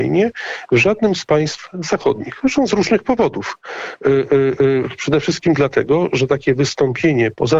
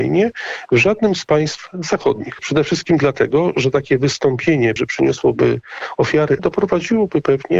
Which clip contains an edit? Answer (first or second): second